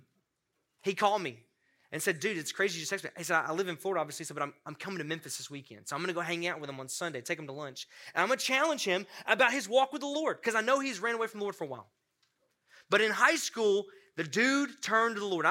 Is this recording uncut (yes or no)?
yes